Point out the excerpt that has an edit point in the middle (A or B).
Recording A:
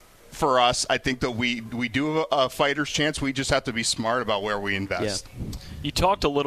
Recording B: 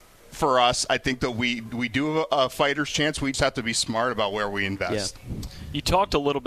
B